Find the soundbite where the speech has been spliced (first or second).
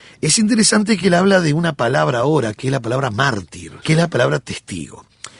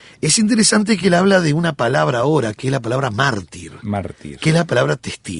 first